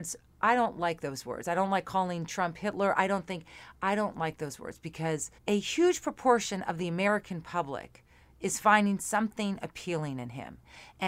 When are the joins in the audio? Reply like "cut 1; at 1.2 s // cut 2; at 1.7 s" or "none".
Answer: cut 1; at 5.4 s